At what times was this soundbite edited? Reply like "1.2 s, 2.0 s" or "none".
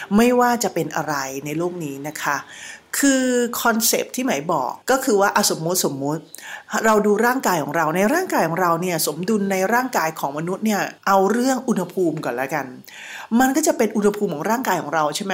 4.8 s, 11.0 s